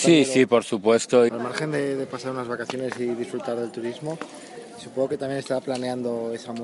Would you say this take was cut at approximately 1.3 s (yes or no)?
yes